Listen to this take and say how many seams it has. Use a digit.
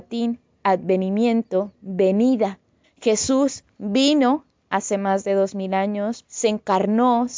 2